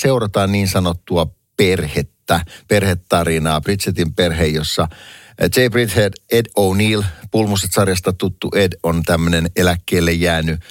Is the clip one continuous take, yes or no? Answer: yes